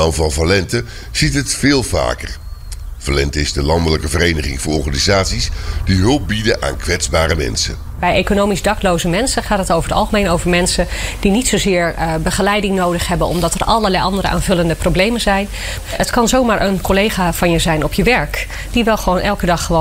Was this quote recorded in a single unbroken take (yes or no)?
no